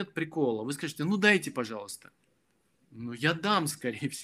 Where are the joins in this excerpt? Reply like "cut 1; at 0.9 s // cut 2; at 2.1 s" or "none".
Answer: none